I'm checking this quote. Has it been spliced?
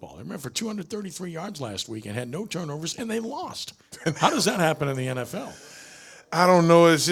no; 0 cuts

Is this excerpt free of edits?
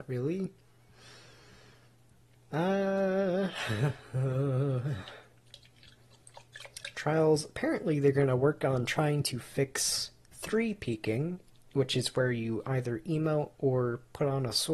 yes; 0 cuts

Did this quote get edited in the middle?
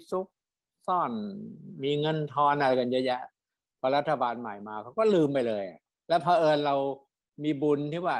no; 0 cuts

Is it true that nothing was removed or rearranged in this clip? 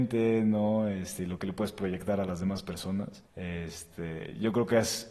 no; 1 cut; at 3.3 s

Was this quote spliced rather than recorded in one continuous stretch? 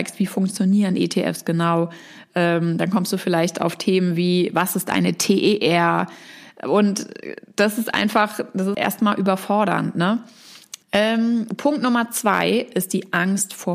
yes; 2 cuts; at 8.7 s, 10.8 s

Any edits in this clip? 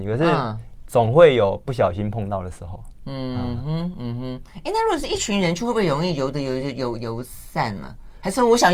no; 0 cuts

